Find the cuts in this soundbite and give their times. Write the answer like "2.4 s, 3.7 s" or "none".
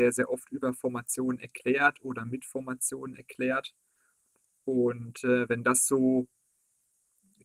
none

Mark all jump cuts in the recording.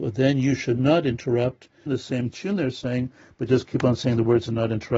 1.9 s

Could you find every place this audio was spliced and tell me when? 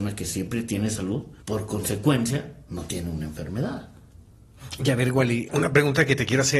1.4 s, 5.5 s

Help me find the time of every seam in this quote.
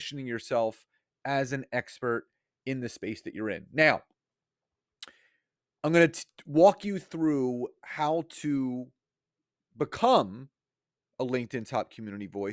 none

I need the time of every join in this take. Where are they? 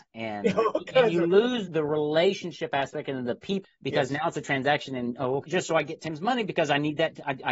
1.7 s, 3.6 s, 5.4 s

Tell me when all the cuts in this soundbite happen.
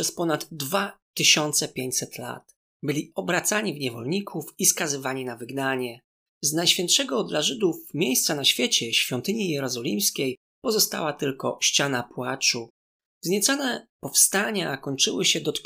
none

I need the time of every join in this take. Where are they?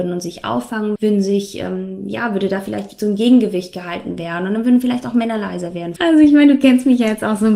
1.0 s, 6.0 s

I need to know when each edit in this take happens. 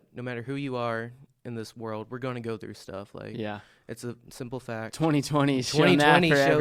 none

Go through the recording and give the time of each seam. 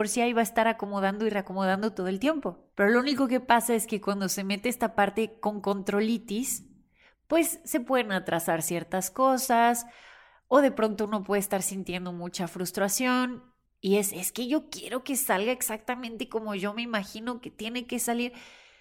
none

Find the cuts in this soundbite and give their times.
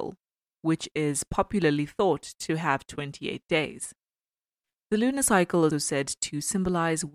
5.7 s

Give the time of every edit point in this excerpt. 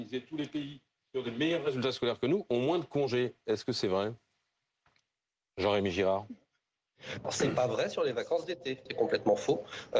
7.2 s, 8.9 s

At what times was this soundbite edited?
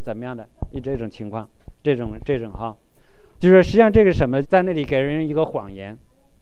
3.4 s, 4.4 s

